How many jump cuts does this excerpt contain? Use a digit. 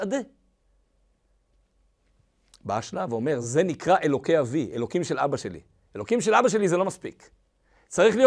0